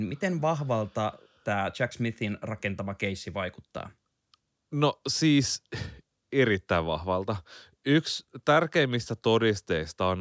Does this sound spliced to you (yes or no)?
no